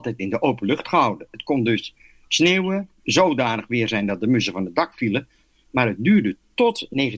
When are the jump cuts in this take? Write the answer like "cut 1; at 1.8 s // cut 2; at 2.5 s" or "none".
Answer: cut 1; at 3.0 s